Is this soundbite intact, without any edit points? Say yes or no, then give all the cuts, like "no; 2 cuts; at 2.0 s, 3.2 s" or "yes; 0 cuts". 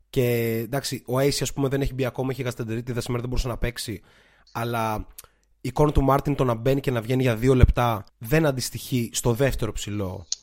no; 1 cut; at 8.1 s